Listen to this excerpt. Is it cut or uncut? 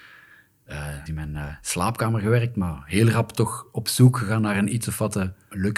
cut